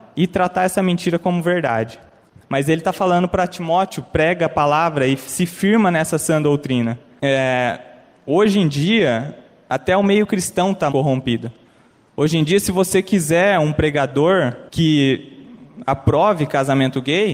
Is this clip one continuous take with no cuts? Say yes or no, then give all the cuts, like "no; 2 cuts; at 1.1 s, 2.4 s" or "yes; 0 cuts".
no; 2 cuts; at 10.9 s, 14.7 s